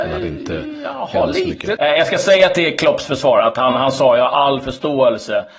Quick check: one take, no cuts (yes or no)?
no